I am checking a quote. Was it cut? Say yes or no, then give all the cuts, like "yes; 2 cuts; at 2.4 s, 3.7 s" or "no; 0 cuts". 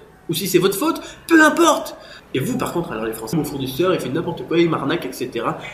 yes; 2 cuts; at 2.2 s, 3.3 s